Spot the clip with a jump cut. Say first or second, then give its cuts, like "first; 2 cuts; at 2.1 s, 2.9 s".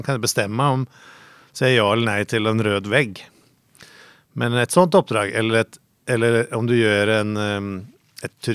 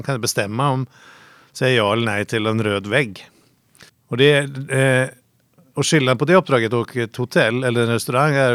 second; 1 cut; at 3.9 s